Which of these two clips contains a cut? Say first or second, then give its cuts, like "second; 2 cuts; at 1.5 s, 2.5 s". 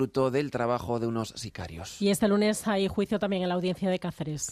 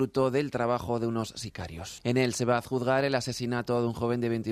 second; 1 cut; at 2.0 s